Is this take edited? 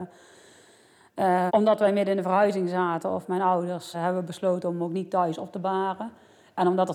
yes; 2 cuts; at 1.5 s, 3.9 s

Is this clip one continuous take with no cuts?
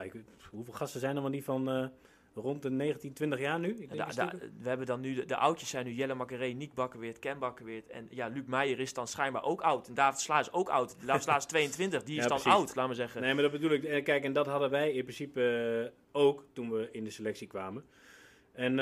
yes; 0 cuts

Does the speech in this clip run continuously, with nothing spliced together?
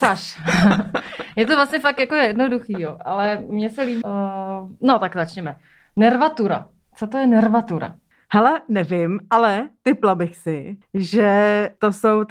no; 1 cut; at 4.0 s

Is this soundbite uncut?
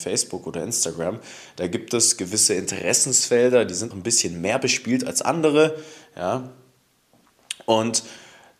no; 1 cut; at 3.9 s

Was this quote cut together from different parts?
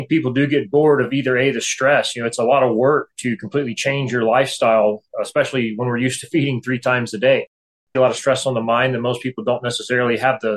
yes; 1 cut; at 7.9 s

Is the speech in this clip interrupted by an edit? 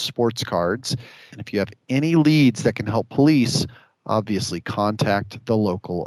yes; 1 cut; at 1.3 s

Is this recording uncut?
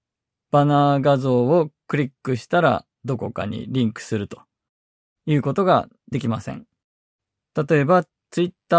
no; 1 cut; at 2.9 s

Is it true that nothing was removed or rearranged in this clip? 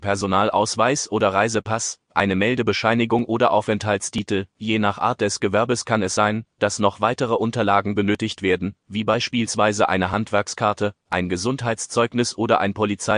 yes; 0 cuts

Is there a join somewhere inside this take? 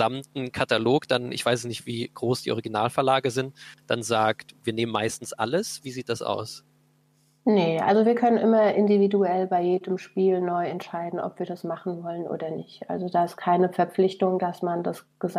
no; 0 cuts

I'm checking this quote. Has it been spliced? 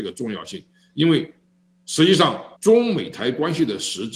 yes; 1 cut; at 2.6 s

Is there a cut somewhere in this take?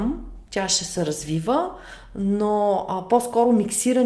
no; 0 cuts

